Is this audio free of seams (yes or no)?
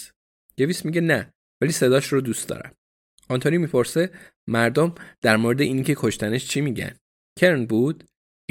yes